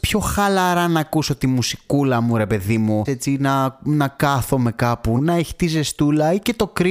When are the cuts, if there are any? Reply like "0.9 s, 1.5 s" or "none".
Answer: 3.0 s, 5.2 s